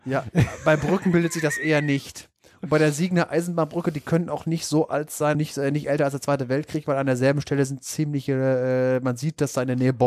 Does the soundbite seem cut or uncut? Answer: cut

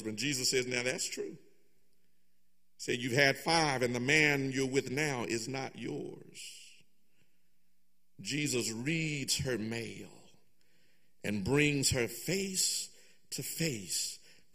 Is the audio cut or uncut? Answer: uncut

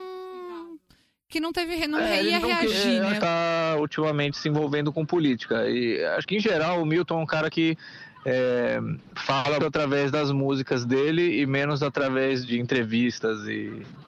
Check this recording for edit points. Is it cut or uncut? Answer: cut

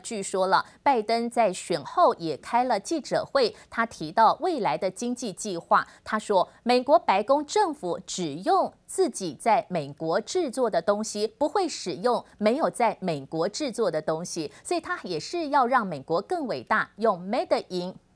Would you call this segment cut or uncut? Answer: uncut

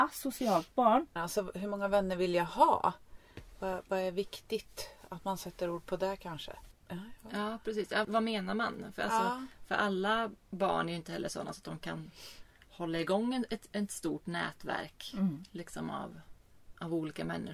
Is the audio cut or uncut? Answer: cut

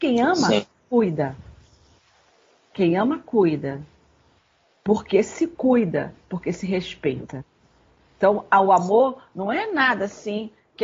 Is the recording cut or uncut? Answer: uncut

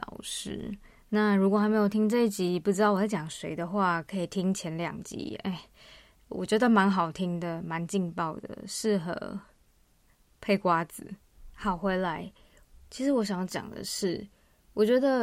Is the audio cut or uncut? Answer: uncut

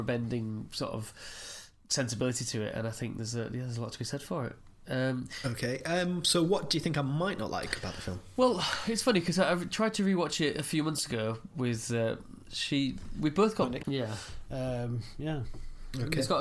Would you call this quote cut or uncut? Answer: cut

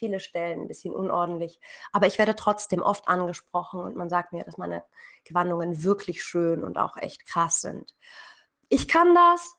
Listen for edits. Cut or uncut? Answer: uncut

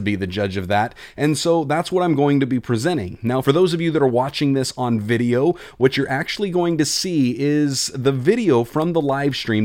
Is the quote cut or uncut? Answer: uncut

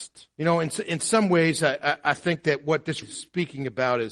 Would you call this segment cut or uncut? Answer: cut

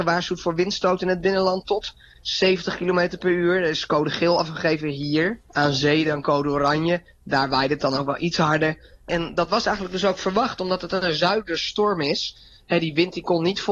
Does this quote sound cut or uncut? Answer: cut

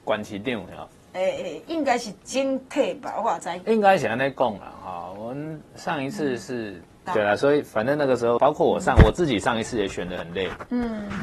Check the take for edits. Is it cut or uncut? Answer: cut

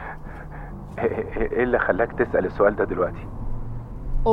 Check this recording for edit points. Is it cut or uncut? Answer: cut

